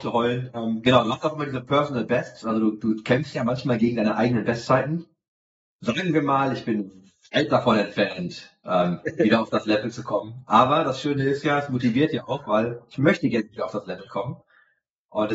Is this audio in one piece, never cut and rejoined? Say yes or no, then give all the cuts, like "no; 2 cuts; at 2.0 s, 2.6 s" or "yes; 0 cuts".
yes; 0 cuts